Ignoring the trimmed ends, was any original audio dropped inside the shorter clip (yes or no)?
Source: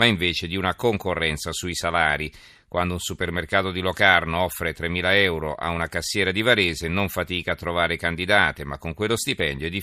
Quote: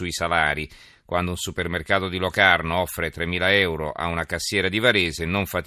no